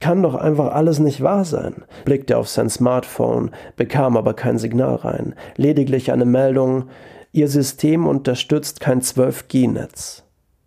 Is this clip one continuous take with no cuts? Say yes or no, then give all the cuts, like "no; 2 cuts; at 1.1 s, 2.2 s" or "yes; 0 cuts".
no; 1 cut; at 2.0 s